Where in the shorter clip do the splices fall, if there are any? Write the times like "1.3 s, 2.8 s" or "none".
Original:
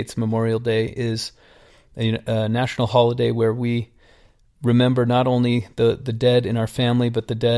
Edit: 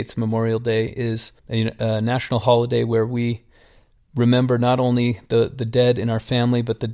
1.4 s